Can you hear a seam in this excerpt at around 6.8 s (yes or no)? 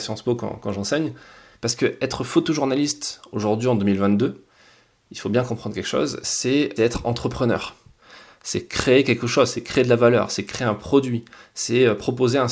yes